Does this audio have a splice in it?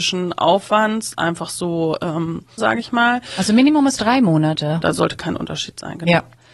yes; 2 cuts; at 2.6 s, 4.8 s

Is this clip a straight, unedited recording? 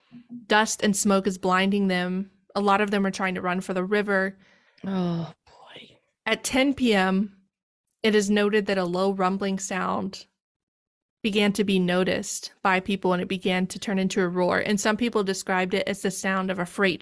no; 1 cut; at 4.7 s

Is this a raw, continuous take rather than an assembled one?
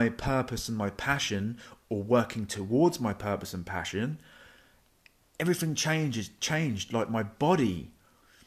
yes; 0 cuts

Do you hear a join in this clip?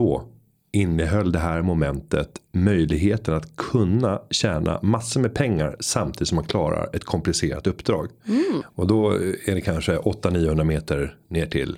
yes; 1 cut; at 8.6 s

